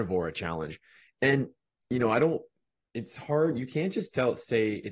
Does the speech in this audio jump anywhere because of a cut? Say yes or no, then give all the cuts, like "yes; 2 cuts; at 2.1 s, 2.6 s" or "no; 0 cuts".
no; 0 cuts